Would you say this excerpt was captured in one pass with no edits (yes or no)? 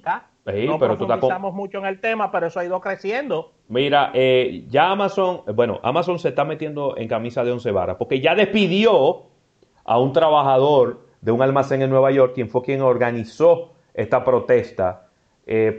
yes